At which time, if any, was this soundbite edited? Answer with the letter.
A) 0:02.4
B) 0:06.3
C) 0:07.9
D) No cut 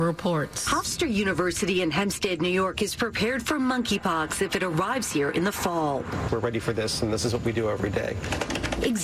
B